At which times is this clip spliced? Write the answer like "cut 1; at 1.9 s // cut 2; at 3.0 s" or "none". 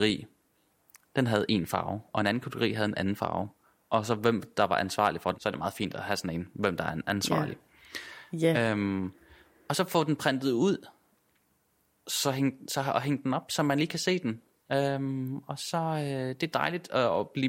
cut 1; at 5.3 s